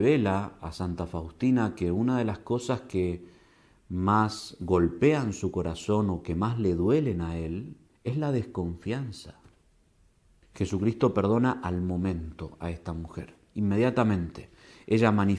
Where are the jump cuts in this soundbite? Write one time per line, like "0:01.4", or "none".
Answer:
0:07.9
0:10.4